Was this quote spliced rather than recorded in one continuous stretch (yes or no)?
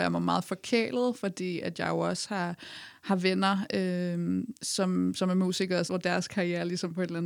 yes